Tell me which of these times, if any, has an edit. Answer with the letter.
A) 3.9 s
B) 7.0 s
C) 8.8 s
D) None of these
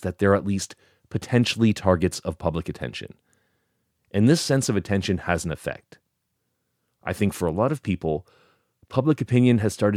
A